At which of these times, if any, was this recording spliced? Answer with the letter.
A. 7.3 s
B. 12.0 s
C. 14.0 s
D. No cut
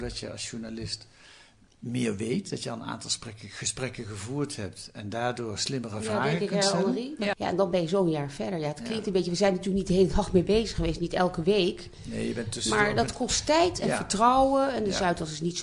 A